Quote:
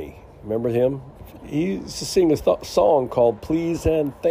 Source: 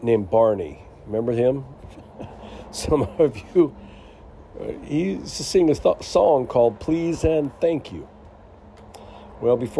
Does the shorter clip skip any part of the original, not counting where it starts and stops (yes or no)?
yes